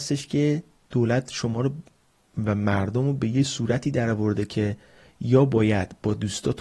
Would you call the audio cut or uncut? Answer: uncut